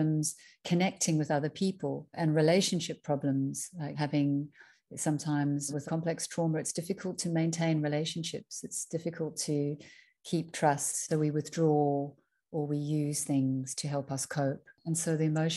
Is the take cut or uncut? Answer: uncut